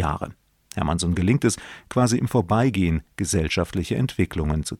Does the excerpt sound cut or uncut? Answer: uncut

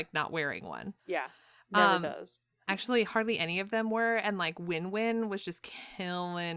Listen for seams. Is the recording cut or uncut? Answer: cut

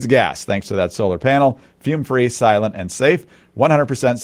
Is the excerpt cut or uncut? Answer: uncut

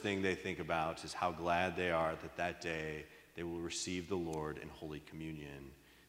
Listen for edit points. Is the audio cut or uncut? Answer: uncut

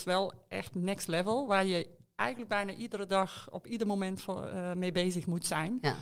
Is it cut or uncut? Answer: uncut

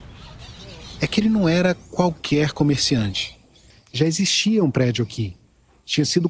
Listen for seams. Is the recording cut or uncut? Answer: cut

